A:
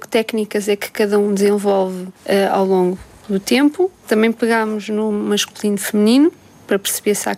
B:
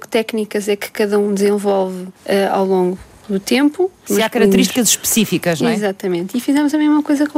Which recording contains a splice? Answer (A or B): B